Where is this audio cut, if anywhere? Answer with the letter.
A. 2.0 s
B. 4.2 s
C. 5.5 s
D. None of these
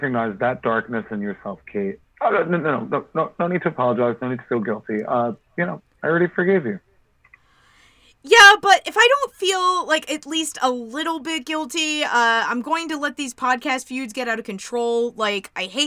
A